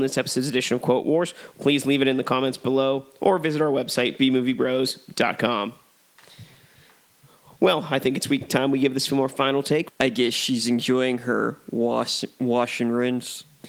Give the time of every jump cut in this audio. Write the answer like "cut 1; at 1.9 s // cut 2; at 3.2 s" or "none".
cut 1; at 1.5 s // cut 2; at 9.9 s